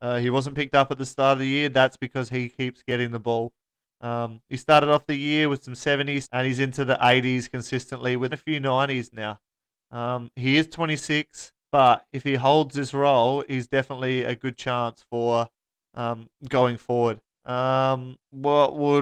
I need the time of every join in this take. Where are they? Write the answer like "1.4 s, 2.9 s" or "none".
6.2 s, 8.3 s